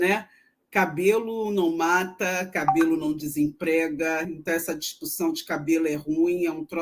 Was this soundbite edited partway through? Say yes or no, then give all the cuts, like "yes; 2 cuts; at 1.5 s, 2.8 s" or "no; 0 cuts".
no; 0 cuts